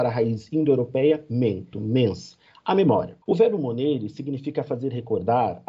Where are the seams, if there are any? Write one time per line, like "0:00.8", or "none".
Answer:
0:01.7
0:03.2